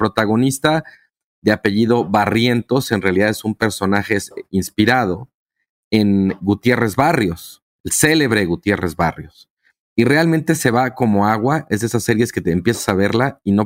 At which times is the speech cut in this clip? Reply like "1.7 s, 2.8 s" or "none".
none